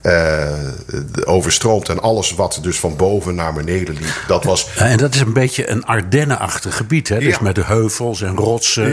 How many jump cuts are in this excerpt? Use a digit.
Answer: 0